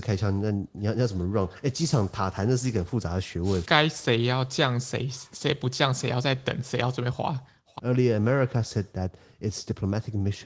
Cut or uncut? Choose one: cut